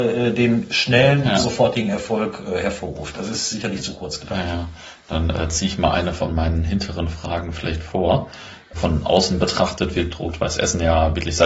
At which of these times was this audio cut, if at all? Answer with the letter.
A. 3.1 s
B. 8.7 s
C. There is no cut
B